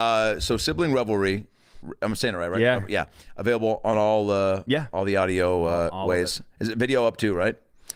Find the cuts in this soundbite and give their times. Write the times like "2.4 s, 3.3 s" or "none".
none